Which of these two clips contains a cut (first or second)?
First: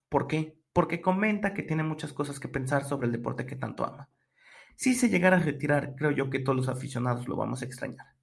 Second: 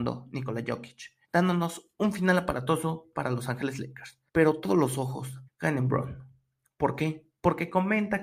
second